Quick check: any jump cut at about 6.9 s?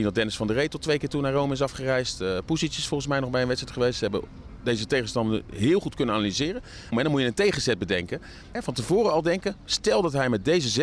yes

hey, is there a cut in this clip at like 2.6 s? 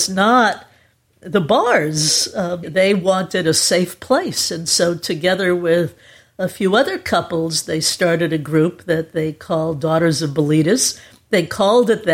yes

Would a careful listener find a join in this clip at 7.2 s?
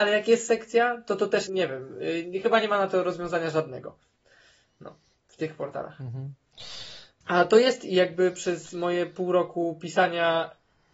yes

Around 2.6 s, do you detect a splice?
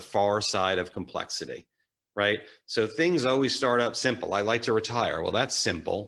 no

